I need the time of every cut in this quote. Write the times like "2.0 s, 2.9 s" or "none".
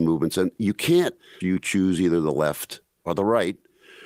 1.4 s